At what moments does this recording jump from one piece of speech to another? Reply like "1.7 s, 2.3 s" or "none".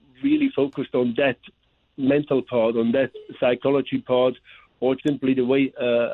5.0 s